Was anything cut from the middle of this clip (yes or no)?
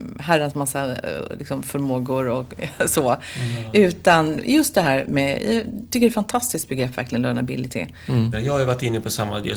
yes